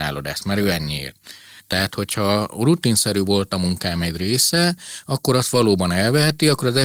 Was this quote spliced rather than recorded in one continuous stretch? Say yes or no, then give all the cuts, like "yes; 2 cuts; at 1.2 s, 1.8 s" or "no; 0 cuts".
yes; 1 cut; at 1.6 s